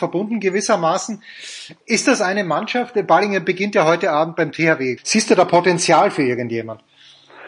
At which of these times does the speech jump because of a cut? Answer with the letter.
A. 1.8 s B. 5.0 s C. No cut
B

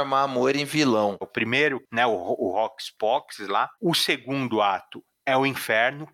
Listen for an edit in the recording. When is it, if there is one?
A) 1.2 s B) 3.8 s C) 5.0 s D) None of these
A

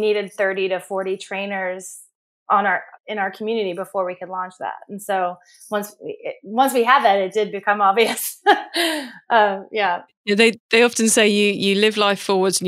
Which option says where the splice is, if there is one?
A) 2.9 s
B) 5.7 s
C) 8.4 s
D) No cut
A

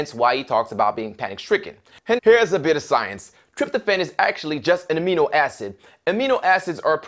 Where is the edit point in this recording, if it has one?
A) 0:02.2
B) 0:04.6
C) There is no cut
A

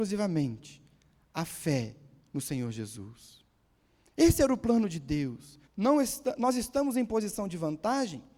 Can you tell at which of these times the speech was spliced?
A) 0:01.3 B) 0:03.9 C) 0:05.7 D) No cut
C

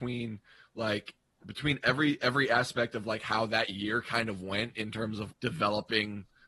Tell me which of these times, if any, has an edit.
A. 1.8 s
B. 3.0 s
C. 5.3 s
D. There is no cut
C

